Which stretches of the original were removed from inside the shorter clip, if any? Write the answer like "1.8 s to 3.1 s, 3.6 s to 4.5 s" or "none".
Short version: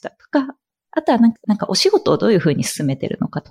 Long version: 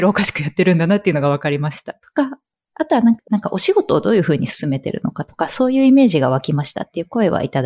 none